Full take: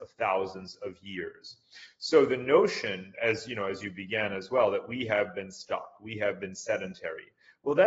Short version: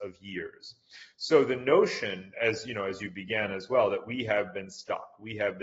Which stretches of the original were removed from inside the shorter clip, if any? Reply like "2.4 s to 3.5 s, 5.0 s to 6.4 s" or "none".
none